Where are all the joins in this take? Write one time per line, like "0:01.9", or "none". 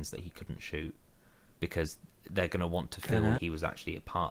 0:03.3